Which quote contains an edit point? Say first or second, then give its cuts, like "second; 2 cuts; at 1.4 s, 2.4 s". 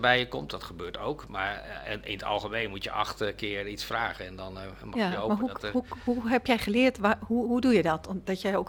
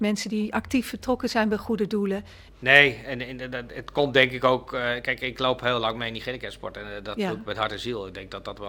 second; 1 cut; at 2.5 s